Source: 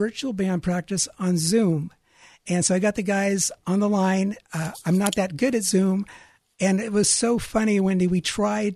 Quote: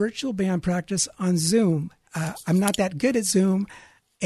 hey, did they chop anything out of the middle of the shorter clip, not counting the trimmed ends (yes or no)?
yes